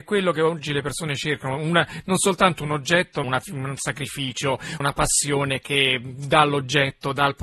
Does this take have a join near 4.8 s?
yes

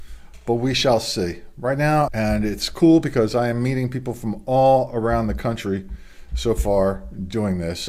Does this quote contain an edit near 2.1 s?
yes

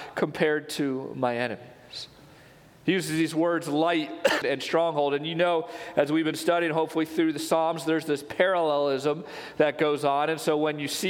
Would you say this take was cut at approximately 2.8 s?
no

